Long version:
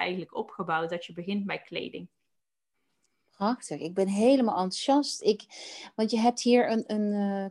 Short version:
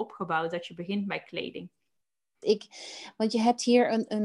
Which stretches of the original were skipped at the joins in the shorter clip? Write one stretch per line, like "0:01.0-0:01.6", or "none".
0:02.8-0:05.2